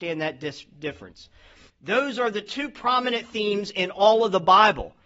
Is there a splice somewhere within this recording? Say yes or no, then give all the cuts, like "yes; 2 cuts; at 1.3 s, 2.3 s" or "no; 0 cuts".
yes; 1 cut; at 1.7 s